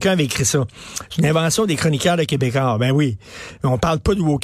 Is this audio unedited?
yes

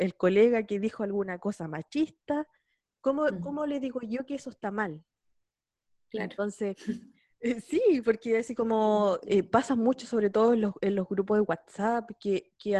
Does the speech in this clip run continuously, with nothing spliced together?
yes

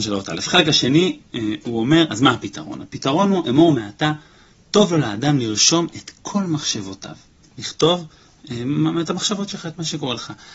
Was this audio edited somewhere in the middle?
yes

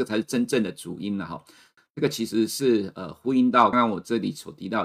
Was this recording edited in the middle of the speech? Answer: yes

